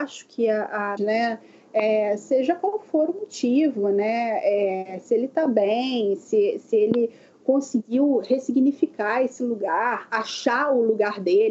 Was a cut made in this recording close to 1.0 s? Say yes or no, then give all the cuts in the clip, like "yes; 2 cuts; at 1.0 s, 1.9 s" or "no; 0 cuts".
yes; 1 cut; at 1.0 s